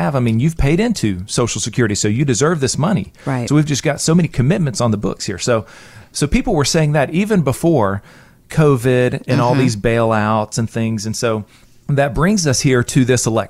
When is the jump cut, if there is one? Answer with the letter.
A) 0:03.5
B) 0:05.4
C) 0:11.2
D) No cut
D